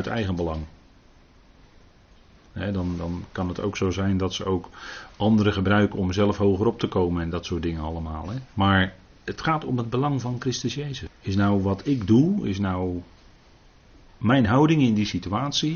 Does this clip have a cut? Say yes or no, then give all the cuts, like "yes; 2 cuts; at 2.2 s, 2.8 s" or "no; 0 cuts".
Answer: yes; 2 cuts; at 8.5 s, 11.1 s